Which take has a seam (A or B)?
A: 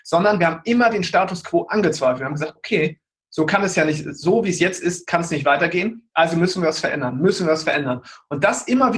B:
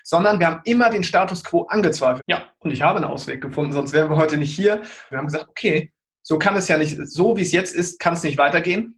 B